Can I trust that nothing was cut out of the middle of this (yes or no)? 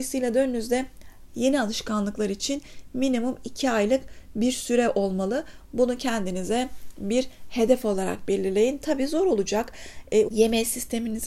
no